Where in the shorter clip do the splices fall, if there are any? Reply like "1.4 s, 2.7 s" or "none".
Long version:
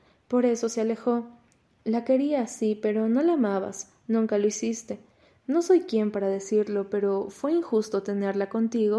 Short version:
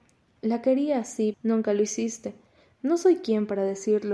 1.3 s